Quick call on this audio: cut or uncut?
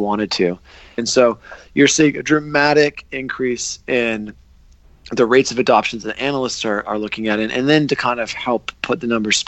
cut